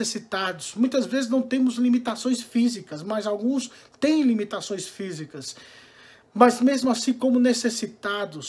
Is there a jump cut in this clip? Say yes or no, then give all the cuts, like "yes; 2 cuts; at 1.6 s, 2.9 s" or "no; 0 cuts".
no; 0 cuts